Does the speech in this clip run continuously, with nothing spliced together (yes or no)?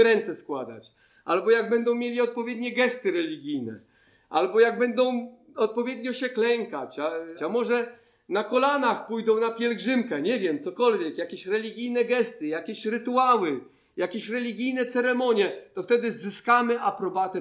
no